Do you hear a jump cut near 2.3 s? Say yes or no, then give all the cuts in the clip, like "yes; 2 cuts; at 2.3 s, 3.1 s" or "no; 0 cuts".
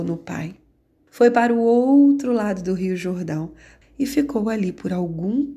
no; 2 cuts; at 1.1 s, 3.8 s